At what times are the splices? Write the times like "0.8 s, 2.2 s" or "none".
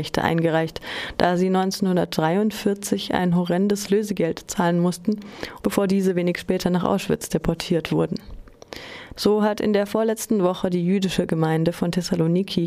5.6 s, 9.1 s